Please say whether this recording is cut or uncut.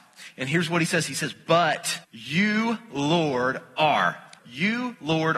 cut